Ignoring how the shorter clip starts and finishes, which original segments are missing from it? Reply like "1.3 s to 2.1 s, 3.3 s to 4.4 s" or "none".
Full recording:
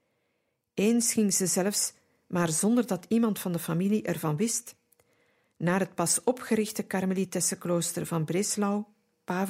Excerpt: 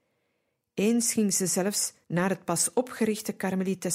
2.0 s to 5.5 s